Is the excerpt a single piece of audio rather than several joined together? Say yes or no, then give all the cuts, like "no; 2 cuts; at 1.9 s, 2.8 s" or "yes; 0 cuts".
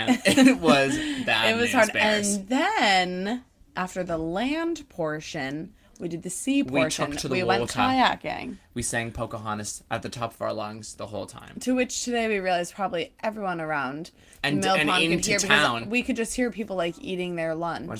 yes; 0 cuts